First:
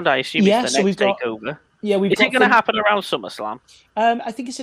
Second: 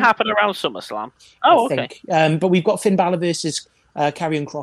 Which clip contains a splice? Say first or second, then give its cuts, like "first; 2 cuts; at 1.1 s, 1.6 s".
second; 1 cut; at 1.4 s